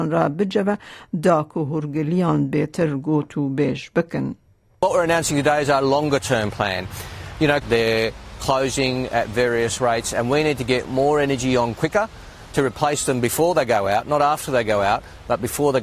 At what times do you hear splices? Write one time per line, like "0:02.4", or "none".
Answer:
0:07.6